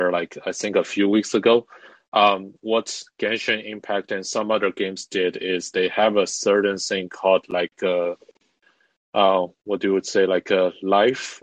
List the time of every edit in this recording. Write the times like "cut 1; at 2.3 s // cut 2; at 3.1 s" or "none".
none